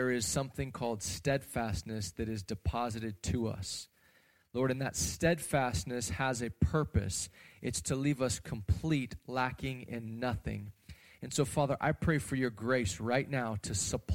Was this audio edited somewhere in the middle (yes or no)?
no